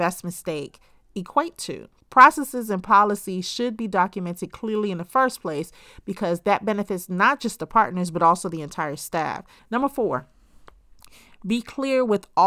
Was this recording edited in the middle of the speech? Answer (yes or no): yes